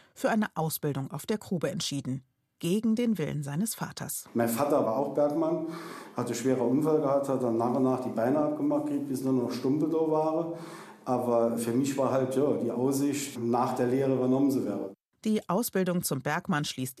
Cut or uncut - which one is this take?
uncut